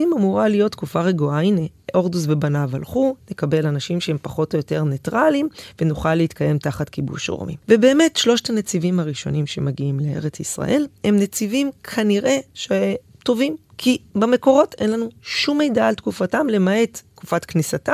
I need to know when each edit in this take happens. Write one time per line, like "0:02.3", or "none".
none